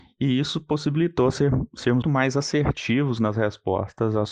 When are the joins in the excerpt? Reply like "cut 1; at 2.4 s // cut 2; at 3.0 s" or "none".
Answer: cut 1; at 2.0 s